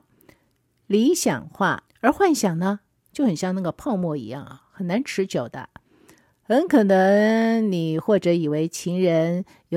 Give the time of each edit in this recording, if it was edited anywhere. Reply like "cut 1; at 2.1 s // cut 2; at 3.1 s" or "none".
cut 1; at 1.9 s